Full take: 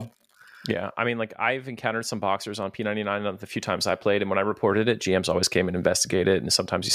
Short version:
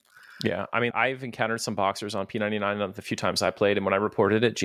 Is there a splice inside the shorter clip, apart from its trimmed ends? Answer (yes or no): yes